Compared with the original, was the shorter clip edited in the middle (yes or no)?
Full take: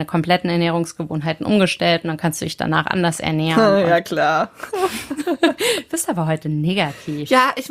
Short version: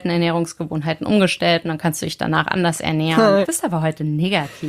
yes